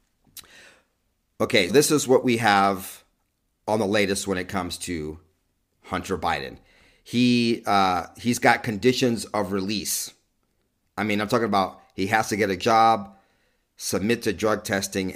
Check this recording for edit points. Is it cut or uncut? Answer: cut